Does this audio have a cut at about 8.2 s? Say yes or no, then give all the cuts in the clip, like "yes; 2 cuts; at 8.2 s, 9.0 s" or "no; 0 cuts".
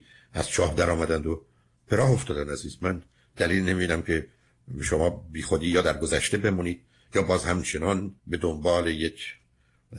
yes; 1 cut; at 8.2 s